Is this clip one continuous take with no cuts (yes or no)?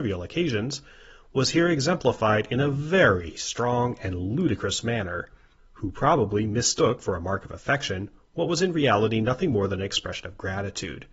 no